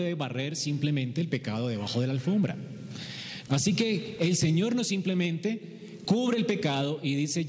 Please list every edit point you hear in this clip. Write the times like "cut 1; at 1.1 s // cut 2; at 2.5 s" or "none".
cut 1; at 3.5 s